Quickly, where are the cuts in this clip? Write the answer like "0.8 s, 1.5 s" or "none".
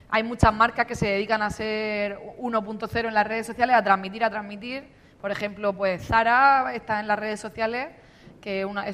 none

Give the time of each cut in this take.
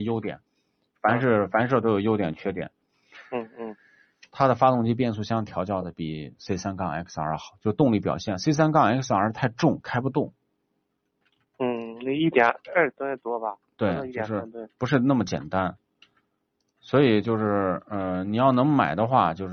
12.6 s

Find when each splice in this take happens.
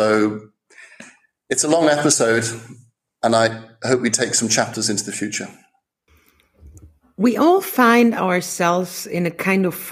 none

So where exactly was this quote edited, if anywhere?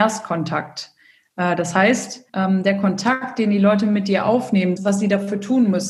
2.3 s, 4.8 s

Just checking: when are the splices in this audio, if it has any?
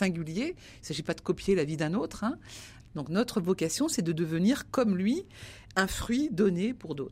2.8 s

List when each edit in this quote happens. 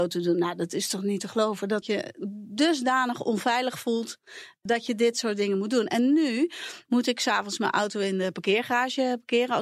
6.9 s

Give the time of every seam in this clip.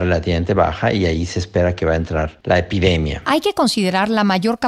none

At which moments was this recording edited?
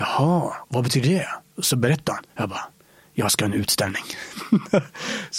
2.3 s

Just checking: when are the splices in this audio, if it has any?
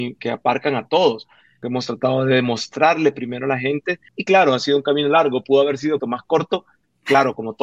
4.1 s, 6.0 s

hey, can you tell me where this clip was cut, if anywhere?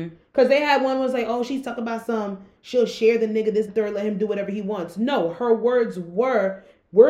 3.7 s

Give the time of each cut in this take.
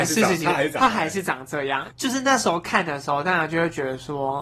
1.9 s

